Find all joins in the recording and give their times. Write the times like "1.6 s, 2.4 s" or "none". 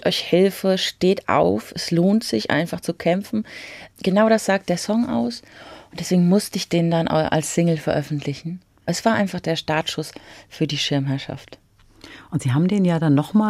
none